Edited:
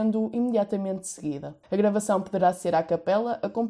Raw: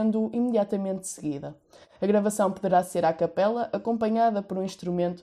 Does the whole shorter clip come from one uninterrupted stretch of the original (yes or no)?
no